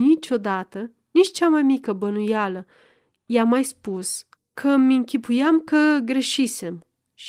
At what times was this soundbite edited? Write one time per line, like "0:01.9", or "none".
0:04.4

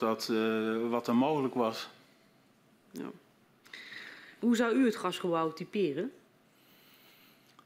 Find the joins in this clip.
0:04.4

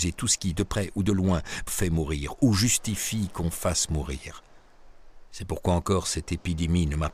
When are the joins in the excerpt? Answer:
0:01.7

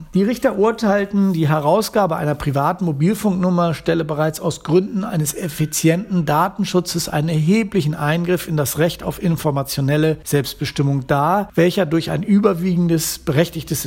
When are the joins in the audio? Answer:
none

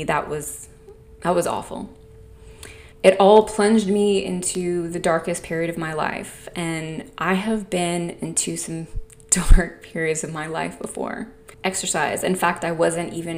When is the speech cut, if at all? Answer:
0:02.9
0:11.5

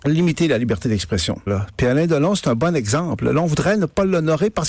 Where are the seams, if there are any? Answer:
0:01.5

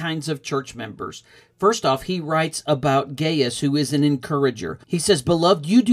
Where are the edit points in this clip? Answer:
0:04.8

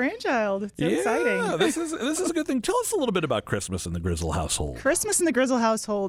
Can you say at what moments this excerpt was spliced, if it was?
none

